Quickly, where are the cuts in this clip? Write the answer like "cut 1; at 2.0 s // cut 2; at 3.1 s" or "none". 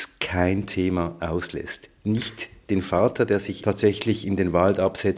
cut 1; at 3.6 s

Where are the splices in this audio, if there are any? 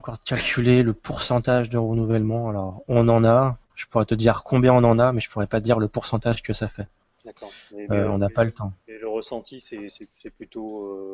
none

